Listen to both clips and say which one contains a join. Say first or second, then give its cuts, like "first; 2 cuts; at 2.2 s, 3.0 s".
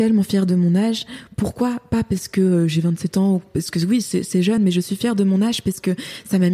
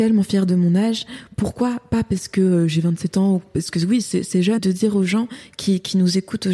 second; 1 cut; at 4.6 s